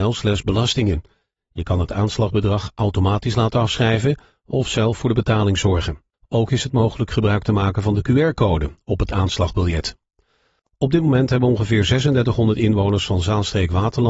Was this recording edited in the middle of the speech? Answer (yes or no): no